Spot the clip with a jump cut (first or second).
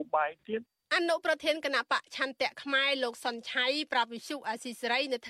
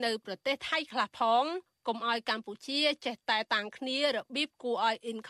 second